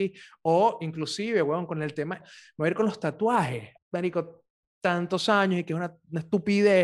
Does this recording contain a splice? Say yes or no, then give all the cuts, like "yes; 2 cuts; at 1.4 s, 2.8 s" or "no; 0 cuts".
yes; 2 cuts; at 2.2 s, 3.8 s